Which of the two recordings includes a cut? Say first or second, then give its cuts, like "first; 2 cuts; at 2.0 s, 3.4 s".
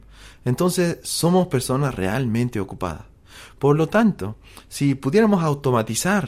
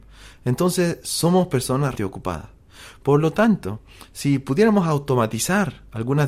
second; 1 cut; at 2.0 s